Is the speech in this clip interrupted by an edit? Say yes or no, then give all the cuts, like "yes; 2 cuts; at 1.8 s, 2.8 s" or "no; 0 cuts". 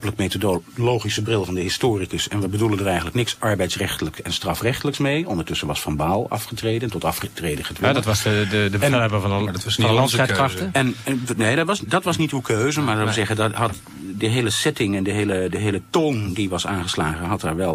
no; 0 cuts